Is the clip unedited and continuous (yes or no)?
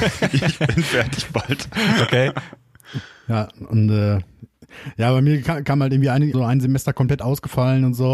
no